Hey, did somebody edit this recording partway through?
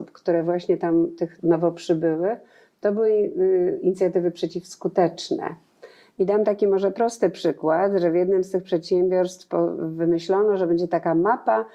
yes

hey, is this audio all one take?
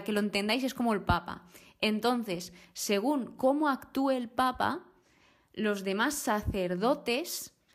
yes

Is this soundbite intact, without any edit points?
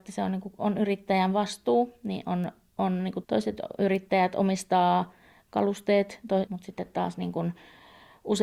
no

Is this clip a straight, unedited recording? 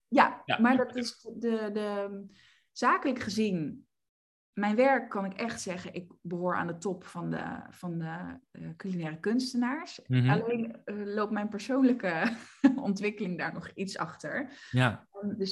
yes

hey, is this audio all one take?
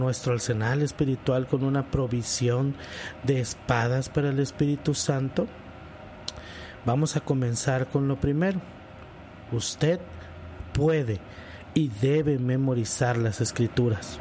yes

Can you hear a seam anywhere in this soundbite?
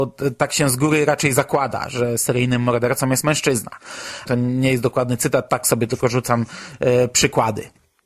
yes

